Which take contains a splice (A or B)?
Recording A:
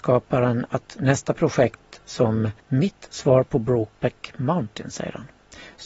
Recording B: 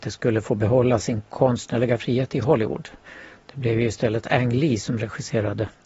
A